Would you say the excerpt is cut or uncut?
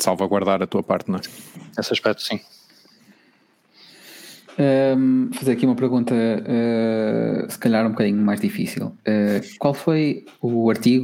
uncut